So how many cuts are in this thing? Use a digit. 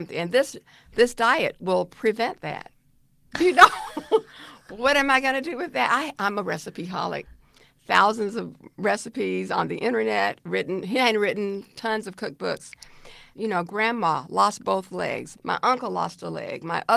3